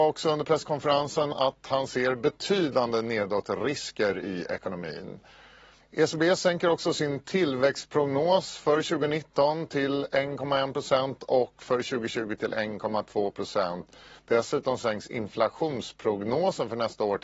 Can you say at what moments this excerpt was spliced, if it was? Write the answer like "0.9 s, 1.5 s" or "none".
5.8 s

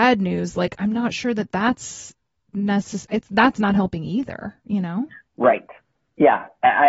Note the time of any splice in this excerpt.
3.1 s

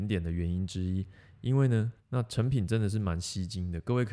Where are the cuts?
2.0 s

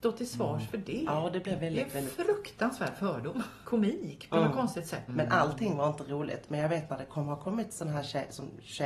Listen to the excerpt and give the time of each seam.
3.6 s, 5.1 s

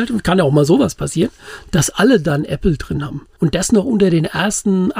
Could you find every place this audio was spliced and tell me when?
3.4 s

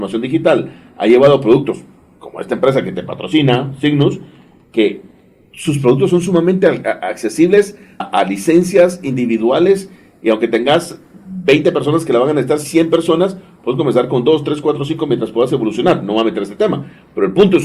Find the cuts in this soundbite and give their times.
8.0 s

